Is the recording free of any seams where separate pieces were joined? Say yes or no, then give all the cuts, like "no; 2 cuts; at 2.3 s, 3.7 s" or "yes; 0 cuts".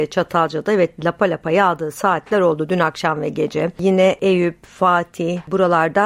yes; 0 cuts